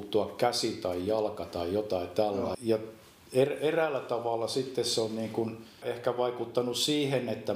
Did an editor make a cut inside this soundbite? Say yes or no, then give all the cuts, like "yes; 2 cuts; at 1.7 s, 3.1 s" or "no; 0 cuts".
yes; 2 cuts; at 2.5 s, 5.8 s